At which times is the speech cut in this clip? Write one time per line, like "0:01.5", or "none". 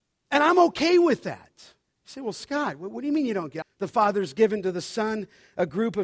0:01.9
0:03.6